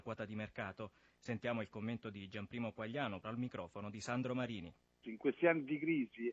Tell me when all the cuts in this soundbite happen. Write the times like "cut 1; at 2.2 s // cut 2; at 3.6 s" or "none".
cut 1; at 3.2 s // cut 2; at 5.0 s